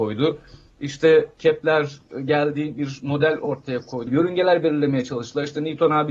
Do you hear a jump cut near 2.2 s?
no; 1 cut; at 4.1 s

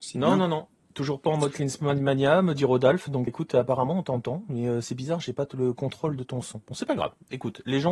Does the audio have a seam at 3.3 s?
yes; 1 cut; at 3.3 s

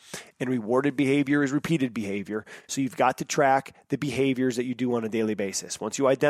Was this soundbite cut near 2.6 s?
no; 0 cuts

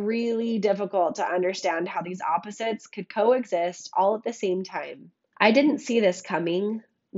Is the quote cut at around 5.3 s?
yes; 1 cut; at 5.3 s

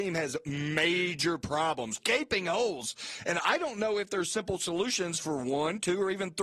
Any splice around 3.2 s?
no; 1 cut; at 2.0 s

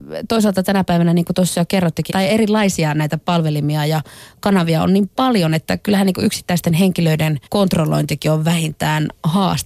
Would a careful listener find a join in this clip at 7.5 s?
yes; 2 cuts; at 2.1 s, 7.5 s

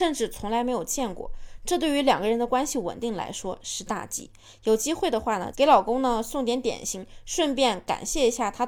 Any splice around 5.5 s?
yes; 1 cut; at 5.5 s

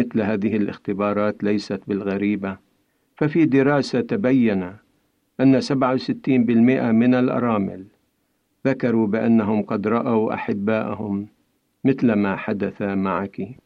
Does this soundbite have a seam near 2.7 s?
no; 0 cuts

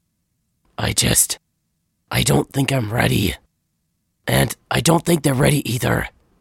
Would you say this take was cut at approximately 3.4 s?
no; 0 cuts

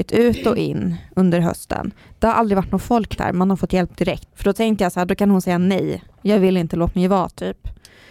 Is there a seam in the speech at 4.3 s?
yes; 1 cut; at 4.3 s

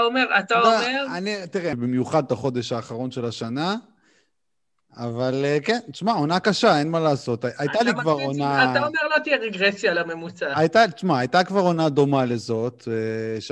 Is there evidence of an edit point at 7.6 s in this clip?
no; 1 cut; at 1.7 s

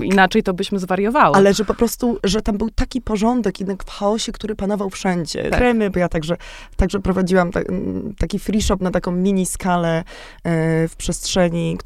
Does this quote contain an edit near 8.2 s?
no; 2 cuts; at 2.2 s, 5.5 s

